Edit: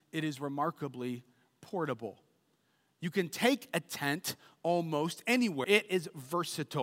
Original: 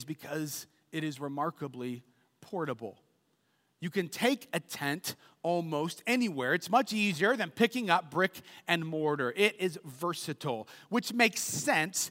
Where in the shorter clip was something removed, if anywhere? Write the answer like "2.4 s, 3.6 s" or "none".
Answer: 5.6 s